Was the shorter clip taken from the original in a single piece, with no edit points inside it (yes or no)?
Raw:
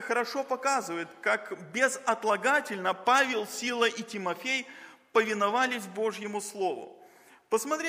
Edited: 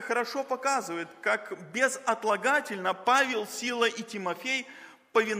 yes